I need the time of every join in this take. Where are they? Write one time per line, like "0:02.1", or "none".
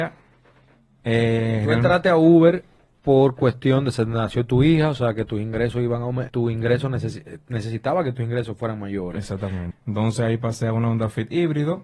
0:06.3
0:09.7